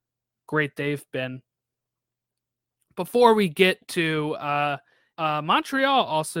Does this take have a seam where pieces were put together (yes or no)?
yes